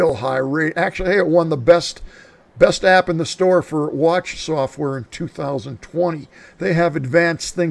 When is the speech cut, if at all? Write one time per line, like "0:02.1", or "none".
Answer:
0:06.4